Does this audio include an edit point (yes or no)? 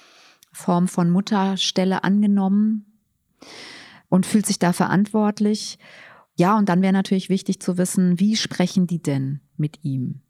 no